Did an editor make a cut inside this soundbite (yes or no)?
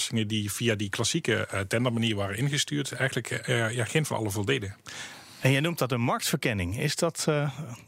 no